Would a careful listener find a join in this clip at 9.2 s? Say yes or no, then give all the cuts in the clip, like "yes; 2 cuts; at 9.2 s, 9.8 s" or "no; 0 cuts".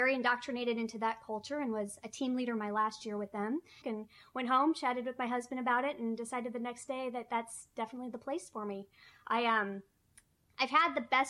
no; 1 cut; at 3.8 s